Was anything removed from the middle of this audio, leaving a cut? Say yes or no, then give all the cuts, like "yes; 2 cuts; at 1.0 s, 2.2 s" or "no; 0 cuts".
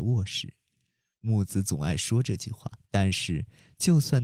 yes; 2 cuts; at 1.1 s, 2.8 s